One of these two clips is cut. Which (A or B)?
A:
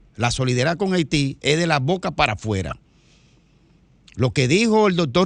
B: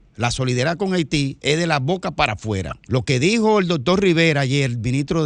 B